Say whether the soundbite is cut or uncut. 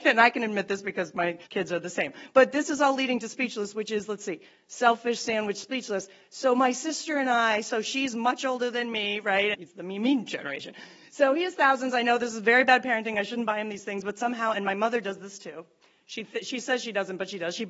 cut